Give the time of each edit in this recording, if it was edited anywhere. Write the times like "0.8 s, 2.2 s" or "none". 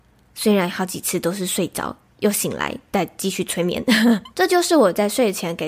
4.3 s